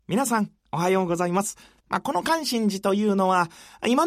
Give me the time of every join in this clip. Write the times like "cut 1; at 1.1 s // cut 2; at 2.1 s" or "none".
cut 1; at 1.8 s

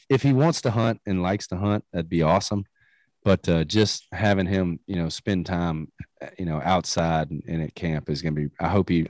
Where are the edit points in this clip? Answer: none

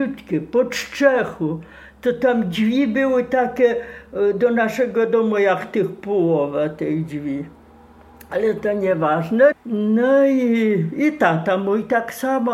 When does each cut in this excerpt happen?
cut 1; at 9.5 s

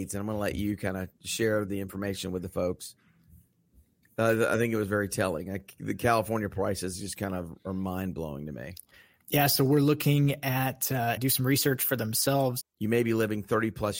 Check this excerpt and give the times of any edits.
cut 1; at 11.2 s // cut 2; at 12.6 s

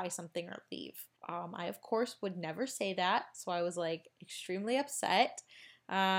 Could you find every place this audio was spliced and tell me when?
cut 1; at 1.2 s

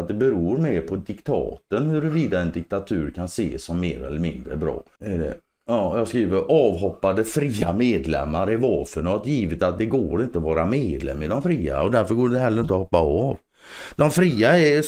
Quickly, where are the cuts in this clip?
cut 1; at 4.9 s

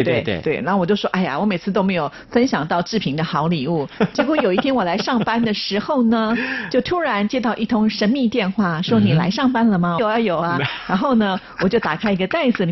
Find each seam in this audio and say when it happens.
cut 1; at 10.0 s

